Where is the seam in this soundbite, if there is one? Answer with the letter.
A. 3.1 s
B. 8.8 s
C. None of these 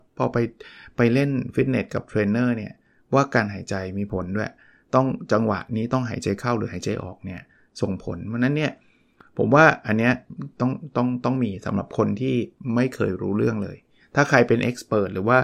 C